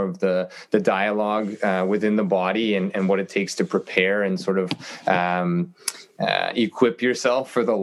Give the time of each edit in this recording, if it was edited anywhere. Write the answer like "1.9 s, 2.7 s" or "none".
none